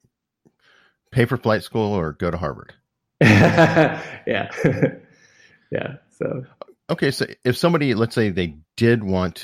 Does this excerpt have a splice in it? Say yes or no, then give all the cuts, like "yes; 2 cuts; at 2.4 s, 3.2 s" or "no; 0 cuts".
no; 0 cuts